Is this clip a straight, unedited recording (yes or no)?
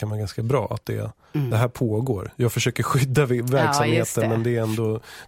yes